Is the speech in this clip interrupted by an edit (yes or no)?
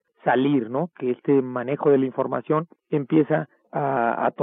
yes